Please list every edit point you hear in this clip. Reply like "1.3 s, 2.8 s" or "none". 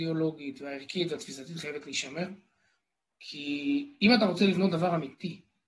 3.1 s